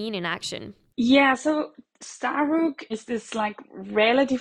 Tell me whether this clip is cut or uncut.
cut